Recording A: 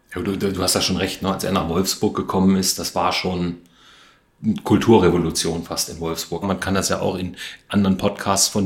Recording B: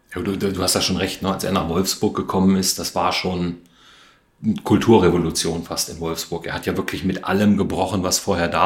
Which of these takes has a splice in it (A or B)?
A